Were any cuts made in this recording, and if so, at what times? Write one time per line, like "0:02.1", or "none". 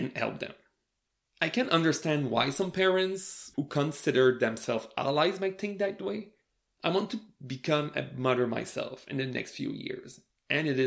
none